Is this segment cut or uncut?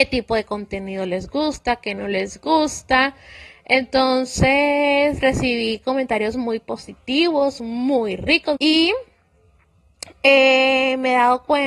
cut